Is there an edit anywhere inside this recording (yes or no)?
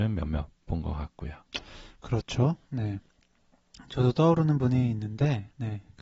yes